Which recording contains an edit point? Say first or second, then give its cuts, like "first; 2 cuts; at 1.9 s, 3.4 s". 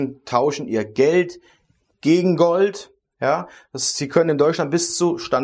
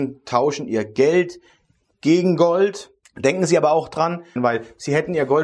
second; 2 cuts; at 3.0 s, 4.4 s